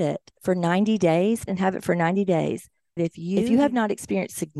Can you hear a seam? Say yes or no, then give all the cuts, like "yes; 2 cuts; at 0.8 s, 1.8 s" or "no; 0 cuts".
yes; 2 cuts; at 1.5 s, 3.0 s